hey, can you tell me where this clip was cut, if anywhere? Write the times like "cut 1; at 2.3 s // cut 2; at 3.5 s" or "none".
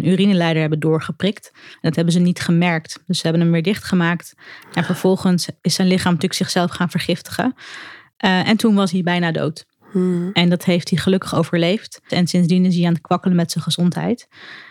cut 1; at 12.1 s